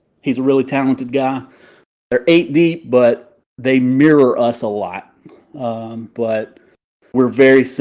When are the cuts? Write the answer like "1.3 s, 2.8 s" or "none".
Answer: 6.1 s